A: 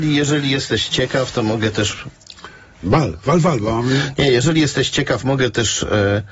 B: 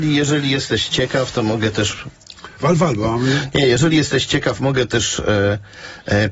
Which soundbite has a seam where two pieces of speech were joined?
B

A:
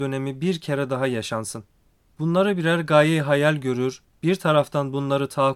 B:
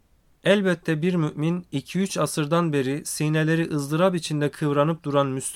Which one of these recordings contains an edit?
A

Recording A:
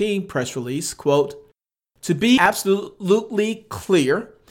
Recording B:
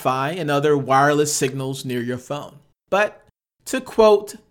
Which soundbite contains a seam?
B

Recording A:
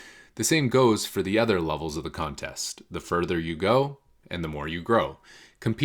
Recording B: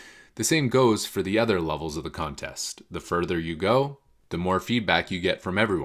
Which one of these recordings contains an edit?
A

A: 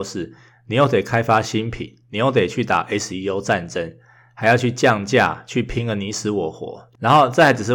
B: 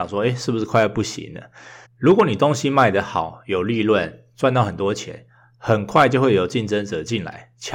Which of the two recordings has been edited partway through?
B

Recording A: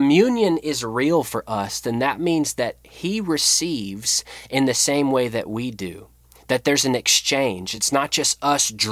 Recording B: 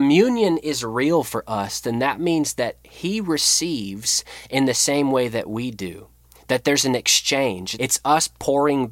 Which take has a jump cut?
B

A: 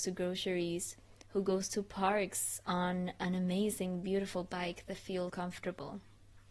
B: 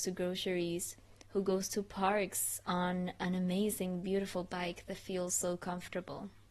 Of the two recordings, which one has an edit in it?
A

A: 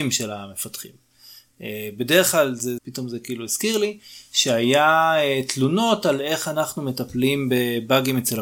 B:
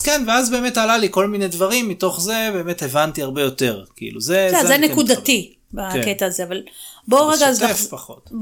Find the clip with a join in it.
A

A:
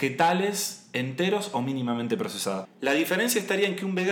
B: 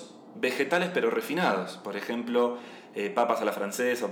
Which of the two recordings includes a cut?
A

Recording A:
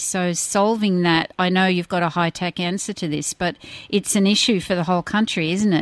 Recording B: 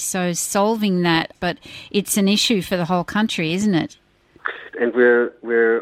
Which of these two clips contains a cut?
B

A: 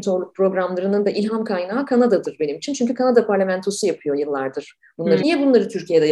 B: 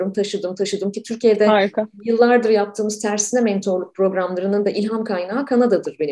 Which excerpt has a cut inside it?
A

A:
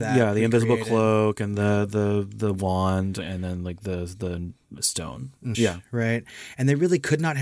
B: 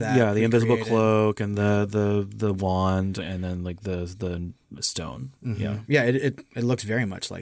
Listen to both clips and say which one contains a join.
A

